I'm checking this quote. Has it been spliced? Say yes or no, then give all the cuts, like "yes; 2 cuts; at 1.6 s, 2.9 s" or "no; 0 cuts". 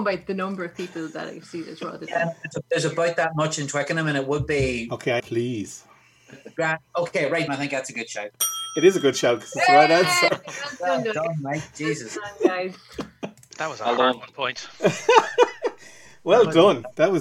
yes; 2 cuts; at 5.2 s, 7.5 s